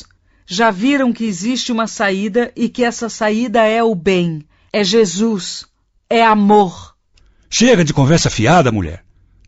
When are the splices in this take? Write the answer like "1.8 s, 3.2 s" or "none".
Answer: none